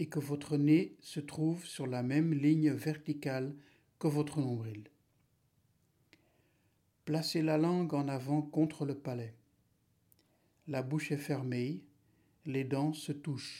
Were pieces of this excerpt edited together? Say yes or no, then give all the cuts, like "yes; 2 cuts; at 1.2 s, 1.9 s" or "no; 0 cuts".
no; 0 cuts